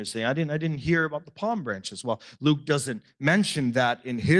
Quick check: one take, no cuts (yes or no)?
yes